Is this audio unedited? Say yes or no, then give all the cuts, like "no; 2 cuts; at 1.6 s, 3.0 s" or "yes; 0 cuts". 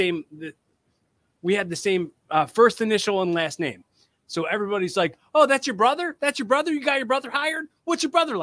yes; 0 cuts